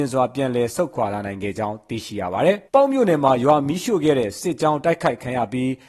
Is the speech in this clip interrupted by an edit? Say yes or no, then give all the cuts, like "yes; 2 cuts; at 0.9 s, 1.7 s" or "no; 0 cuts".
yes; 1 cut; at 2.7 s